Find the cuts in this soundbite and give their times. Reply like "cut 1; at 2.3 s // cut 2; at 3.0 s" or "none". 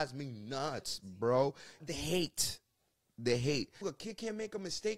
cut 1; at 1.8 s // cut 2; at 3.8 s